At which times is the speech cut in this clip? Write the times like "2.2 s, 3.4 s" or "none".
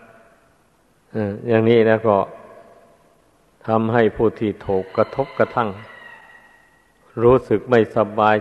none